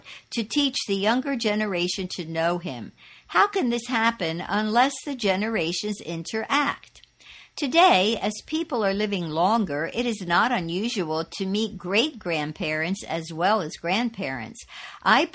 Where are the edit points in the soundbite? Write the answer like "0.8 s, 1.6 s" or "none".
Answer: none